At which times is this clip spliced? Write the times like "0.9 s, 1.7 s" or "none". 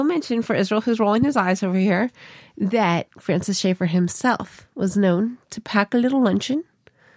none